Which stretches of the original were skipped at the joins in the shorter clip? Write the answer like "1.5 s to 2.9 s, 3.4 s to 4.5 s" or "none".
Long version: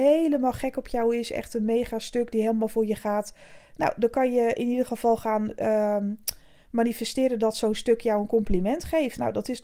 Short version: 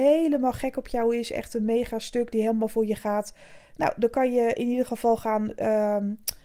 none